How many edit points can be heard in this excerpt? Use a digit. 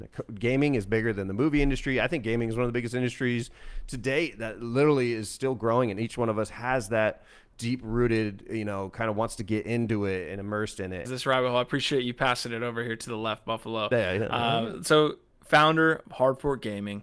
1